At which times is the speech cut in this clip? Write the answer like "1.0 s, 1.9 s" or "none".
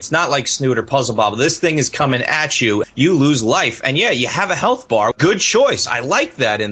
2.8 s, 5.1 s